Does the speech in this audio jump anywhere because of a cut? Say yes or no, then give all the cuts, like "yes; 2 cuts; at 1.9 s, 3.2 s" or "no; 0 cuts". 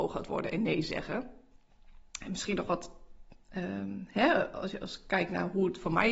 no; 0 cuts